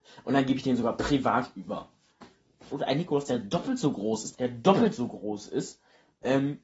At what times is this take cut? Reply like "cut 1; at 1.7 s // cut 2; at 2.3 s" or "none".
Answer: cut 1; at 2.7 s // cut 2; at 4.3 s